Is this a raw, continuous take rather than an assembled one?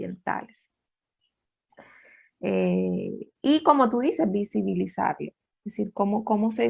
yes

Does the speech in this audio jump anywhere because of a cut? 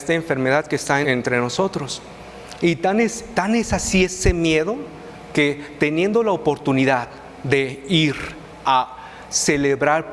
yes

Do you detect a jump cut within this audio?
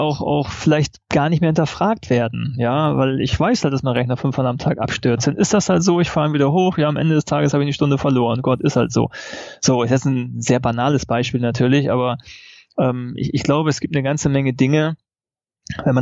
no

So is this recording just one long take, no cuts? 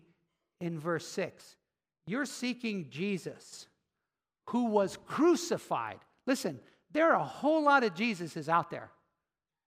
yes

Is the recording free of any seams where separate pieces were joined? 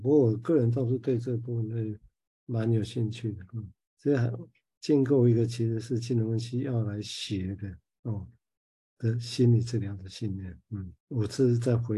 no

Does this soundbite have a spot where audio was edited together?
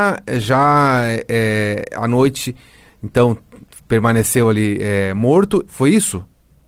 yes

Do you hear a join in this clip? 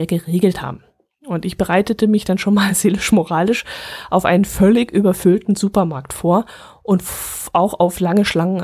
no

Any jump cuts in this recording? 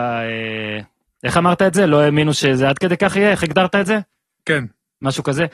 no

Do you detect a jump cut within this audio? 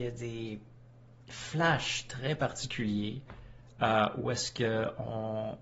no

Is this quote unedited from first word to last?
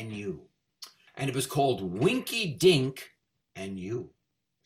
no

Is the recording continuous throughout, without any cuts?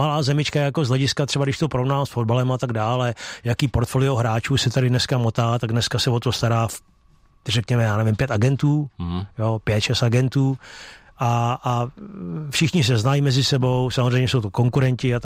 yes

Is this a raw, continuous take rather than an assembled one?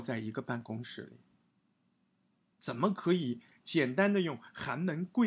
no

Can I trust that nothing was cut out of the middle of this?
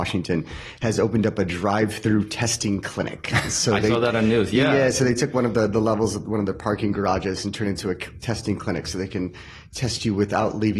yes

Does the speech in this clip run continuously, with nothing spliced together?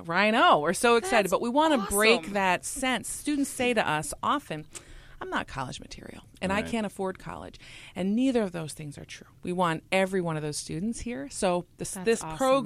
yes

